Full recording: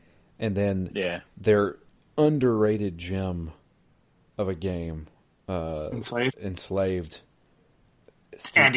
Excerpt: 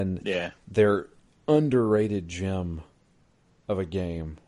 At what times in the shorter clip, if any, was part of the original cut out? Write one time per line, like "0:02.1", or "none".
none